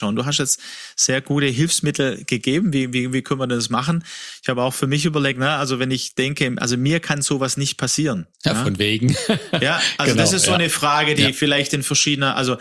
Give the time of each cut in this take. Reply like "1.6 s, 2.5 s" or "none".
8.3 s